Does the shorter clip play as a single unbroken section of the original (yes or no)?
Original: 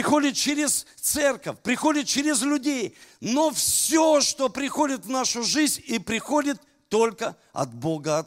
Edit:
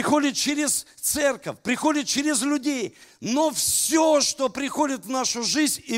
yes